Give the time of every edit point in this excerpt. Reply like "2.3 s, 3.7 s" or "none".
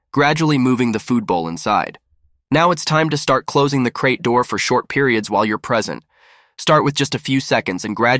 2.4 s